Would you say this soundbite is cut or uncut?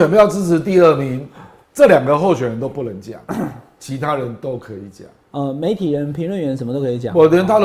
uncut